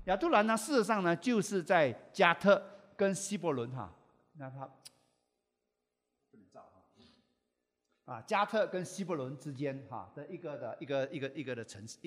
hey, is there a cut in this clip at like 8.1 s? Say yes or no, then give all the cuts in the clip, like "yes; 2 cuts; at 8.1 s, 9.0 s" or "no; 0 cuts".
no; 0 cuts